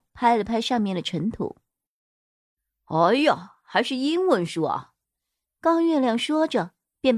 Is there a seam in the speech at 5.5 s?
no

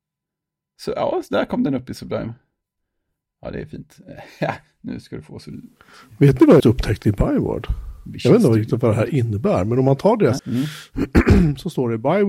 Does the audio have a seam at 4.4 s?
no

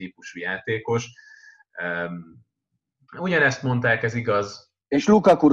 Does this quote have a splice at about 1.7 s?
no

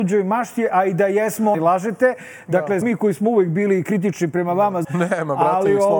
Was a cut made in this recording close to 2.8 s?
yes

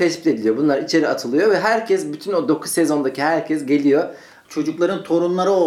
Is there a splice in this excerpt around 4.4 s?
yes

